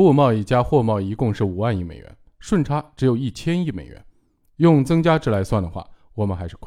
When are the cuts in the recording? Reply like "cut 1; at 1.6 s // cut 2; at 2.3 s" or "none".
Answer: none

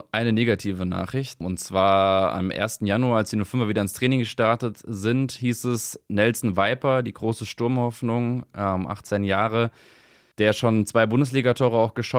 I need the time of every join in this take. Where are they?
none

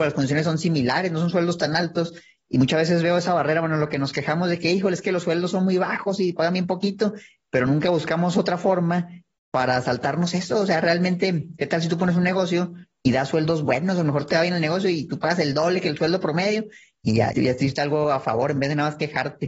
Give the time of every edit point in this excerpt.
cut 1; at 17.3 s

